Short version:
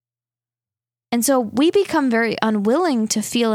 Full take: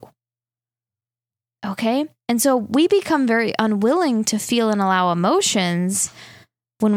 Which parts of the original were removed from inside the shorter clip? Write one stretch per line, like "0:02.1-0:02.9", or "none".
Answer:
0:01.2-0:02.2